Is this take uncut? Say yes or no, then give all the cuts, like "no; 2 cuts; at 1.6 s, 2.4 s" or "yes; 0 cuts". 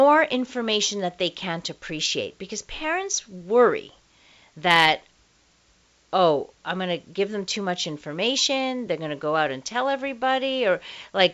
yes; 0 cuts